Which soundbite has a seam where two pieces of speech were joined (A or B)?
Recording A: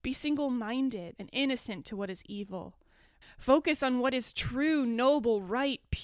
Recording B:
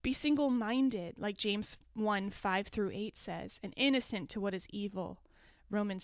A